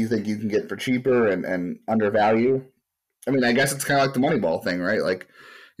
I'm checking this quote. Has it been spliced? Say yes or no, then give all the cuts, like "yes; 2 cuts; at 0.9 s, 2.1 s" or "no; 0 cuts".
no; 0 cuts